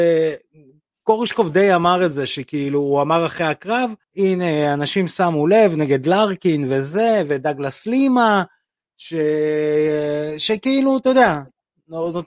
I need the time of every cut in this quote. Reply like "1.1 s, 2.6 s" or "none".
4.0 s